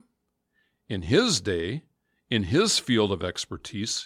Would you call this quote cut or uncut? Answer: uncut